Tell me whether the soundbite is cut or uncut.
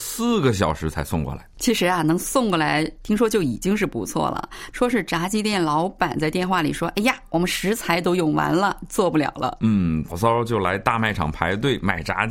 cut